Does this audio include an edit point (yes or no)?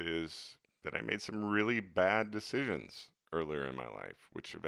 no